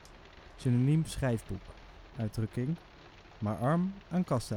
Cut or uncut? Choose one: cut